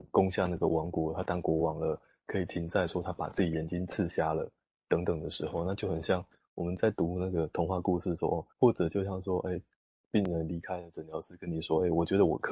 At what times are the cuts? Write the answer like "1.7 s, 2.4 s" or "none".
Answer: 8.5 s